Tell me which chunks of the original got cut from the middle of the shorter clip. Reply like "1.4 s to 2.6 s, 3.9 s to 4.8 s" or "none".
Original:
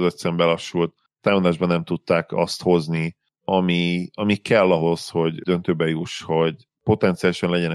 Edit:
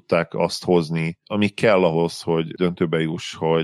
3.2 s to 4.1 s